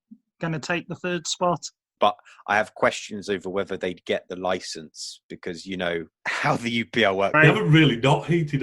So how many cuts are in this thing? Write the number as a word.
three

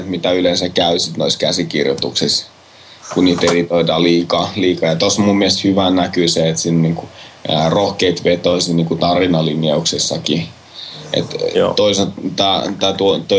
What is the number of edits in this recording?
zero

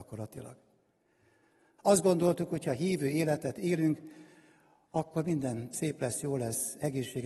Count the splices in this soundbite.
one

